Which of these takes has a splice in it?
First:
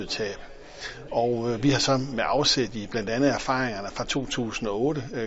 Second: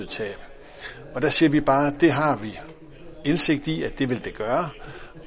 first; 1 cut; at 1.1 s

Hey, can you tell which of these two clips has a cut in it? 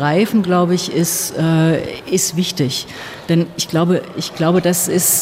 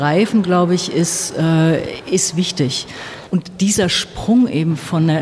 second; 1 cut; at 3.3 s

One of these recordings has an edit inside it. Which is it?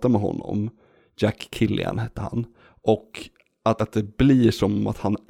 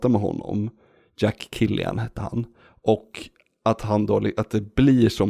first; 1 cut; at 3.8 s

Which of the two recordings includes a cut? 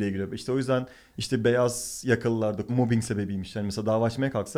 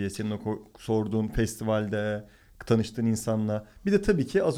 first; 1 cut; at 2.7 s

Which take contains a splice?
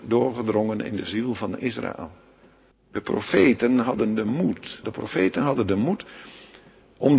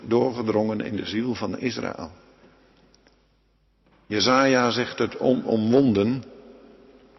first; 2 cuts; at 2.7 s, 4.8 s

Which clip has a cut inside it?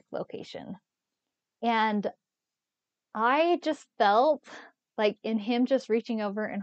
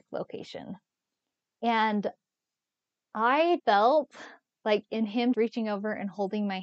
second; 2 cuts; at 3.6 s, 5.3 s

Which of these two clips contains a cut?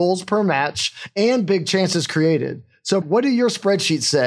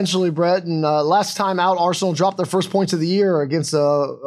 first; 1 cut; at 3.0 s

